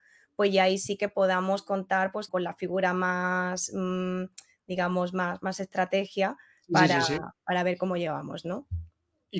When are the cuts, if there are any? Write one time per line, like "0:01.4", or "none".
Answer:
0:02.3